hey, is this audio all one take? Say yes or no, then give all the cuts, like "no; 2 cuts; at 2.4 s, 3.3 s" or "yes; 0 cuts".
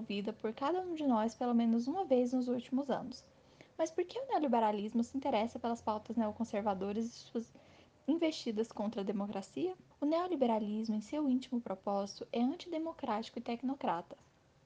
no; 1 cut; at 9.9 s